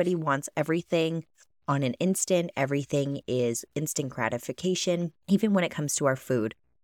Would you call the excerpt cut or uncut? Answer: cut